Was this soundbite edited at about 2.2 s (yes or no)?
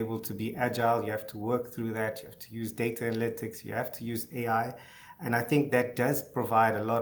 no